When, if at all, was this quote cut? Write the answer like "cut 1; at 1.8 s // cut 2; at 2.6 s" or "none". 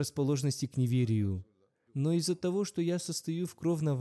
cut 1; at 1.9 s